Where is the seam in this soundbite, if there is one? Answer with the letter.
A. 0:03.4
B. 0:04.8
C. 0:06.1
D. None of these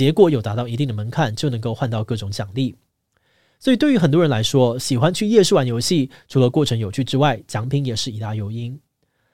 D